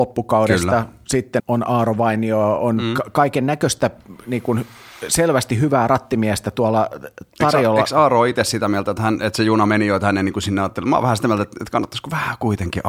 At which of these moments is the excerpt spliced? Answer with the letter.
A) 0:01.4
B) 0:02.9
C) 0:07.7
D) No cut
A